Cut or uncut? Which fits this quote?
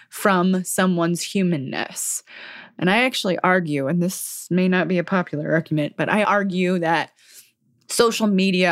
uncut